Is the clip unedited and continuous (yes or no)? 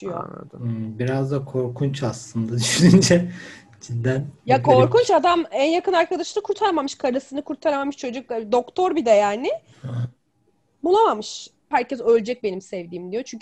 no